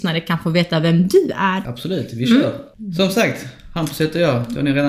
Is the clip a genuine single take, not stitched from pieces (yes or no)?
yes